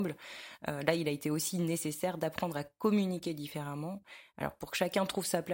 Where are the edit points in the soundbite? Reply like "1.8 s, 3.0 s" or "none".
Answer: none